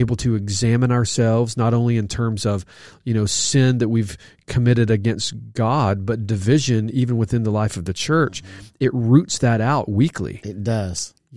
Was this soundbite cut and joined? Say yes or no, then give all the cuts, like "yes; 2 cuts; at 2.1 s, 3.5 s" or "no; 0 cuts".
no; 0 cuts